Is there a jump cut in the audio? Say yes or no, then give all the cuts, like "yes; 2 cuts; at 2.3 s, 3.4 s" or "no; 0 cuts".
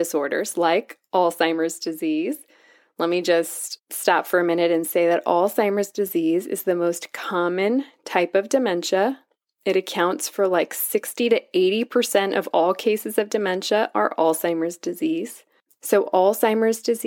no; 0 cuts